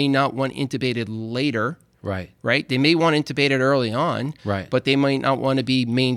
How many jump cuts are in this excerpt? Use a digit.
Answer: 0